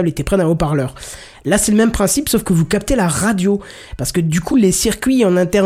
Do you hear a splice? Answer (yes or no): no